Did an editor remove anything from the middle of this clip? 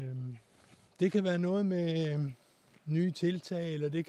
no; 0 cuts

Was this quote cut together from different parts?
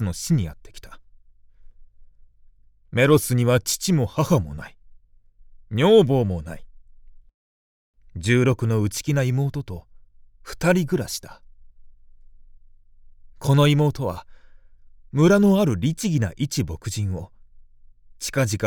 no; 0 cuts

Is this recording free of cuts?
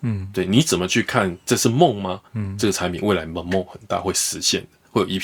no; 1 cut; at 2.3 s

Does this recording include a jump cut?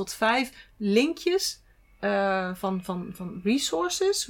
no; 0 cuts

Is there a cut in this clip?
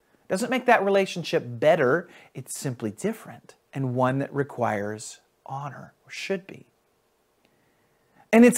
yes; 1 cut; at 3.6 s

